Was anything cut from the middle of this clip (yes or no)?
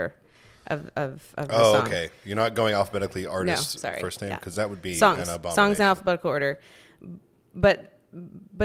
no